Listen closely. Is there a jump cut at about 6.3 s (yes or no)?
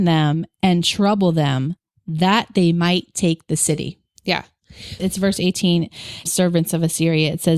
yes